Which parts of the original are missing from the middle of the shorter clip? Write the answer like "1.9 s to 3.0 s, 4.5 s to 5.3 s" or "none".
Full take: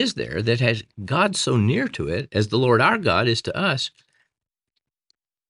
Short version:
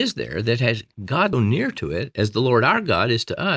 1.3 s to 1.5 s